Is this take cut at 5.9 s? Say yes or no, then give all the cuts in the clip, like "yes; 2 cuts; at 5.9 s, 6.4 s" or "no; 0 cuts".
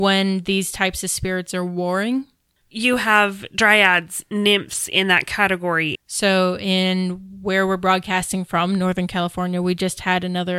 yes; 2 cuts; at 2.6 s, 5.9 s